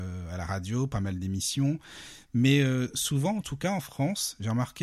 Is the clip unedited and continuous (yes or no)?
yes